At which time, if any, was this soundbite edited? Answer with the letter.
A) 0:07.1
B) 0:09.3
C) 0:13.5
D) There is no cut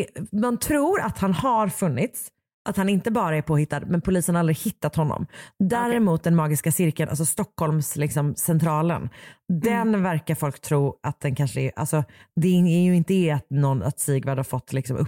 D